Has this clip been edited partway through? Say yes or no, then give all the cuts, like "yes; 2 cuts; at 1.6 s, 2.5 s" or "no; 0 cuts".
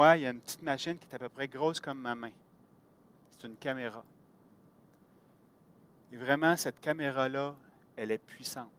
no; 0 cuts